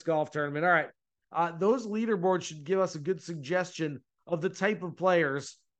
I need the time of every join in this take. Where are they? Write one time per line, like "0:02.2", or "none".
0:01.2